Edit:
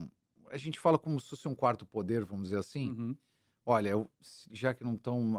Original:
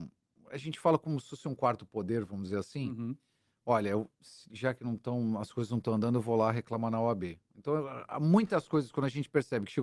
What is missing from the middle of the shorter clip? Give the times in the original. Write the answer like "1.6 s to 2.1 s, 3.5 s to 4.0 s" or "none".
none